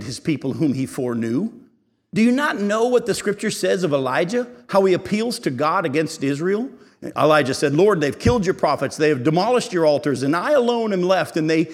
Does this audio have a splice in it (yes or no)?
no